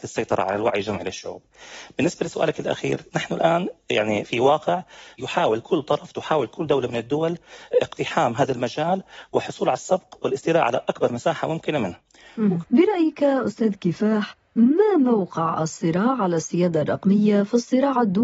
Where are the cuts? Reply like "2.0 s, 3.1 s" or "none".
12.6 s

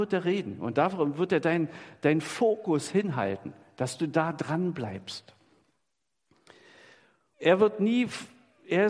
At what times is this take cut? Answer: 7.3 s

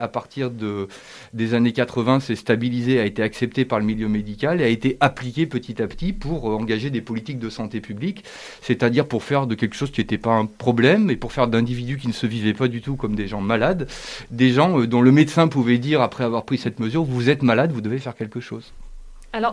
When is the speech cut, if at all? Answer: none

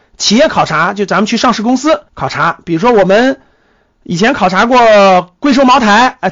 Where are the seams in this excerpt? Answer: 2.1 s

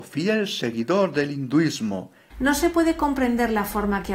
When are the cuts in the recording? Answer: 2.3 s

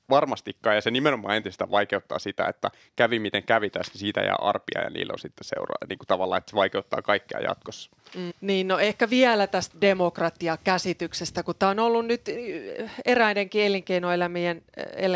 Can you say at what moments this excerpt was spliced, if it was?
8.3 s

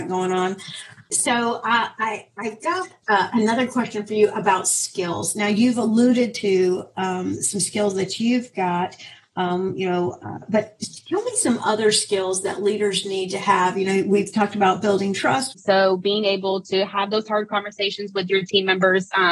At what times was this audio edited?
15.5 s

